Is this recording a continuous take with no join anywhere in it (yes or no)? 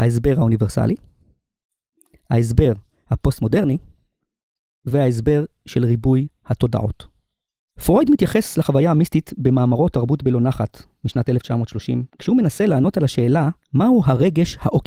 no